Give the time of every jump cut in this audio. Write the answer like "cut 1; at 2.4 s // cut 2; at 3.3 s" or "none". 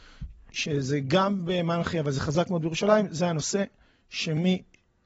none